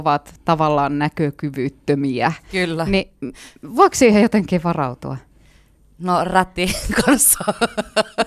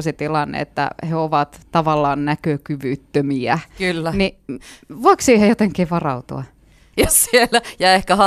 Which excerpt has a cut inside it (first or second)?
second